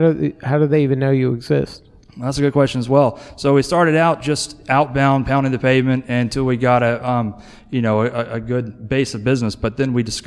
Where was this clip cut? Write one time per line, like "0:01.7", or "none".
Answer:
none